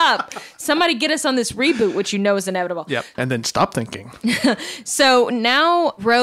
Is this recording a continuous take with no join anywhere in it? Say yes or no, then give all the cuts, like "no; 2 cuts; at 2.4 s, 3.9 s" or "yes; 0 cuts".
no; 1 cut; at 3.1 s